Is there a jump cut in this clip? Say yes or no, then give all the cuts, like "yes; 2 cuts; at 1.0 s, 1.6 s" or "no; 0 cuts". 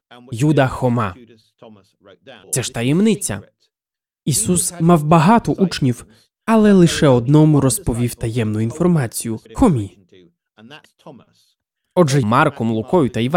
yes; 3 cuts; at 2.4 s, 9.5 s, 12.2 s